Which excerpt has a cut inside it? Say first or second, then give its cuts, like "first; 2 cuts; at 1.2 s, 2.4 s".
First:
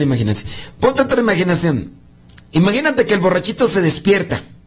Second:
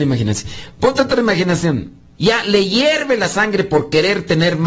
second; 1 cut; at 2.2 s